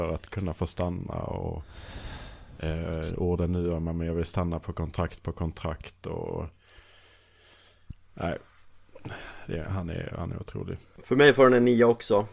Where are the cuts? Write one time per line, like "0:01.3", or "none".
none

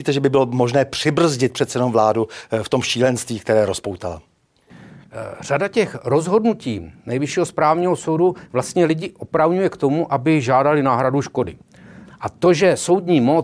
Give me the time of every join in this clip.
0:12.0

